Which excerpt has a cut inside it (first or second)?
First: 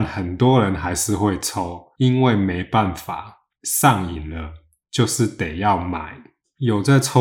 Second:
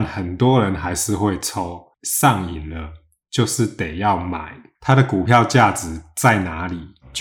second